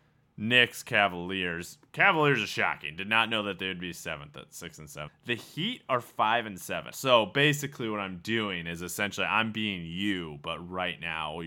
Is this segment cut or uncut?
cut